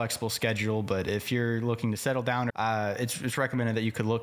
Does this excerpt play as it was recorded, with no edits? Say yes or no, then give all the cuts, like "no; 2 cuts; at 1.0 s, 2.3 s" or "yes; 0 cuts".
no; 1 cut; at 2.5 s